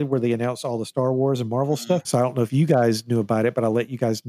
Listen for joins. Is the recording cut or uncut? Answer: cut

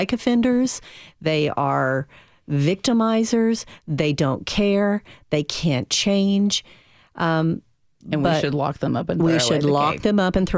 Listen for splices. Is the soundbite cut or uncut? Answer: uncut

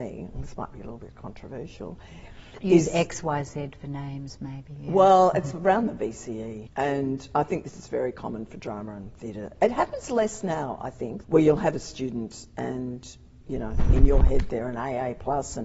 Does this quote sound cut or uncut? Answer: cut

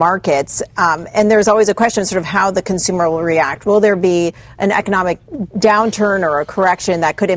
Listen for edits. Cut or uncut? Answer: uncut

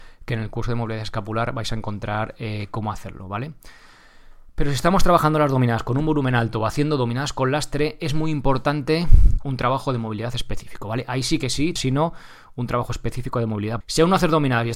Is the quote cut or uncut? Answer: cut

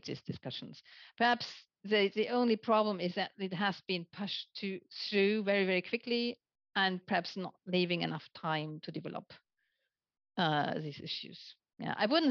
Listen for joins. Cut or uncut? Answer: uncut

